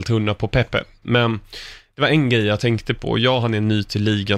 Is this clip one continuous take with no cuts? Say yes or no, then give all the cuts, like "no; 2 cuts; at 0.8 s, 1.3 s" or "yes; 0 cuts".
no; 1 cut; at 1.0 s